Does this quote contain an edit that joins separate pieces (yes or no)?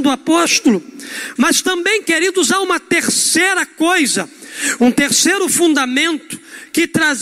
yes